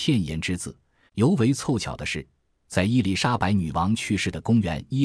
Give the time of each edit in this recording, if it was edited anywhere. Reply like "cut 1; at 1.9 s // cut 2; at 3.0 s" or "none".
cut 1; at 1.1 s